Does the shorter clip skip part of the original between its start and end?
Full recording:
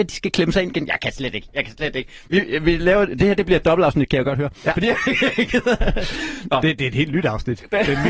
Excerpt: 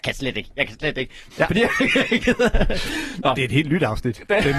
yes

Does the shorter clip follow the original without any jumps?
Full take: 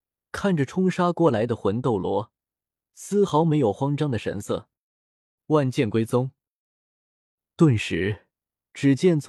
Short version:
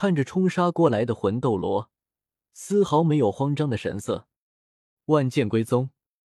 yes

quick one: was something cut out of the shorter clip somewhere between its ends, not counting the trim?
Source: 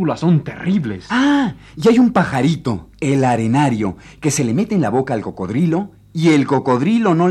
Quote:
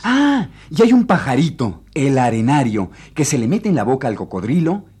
no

